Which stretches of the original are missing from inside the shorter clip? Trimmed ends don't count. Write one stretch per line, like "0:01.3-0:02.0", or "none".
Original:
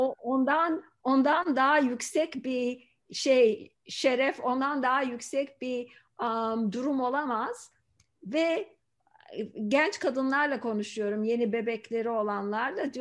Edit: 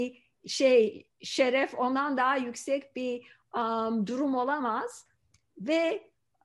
none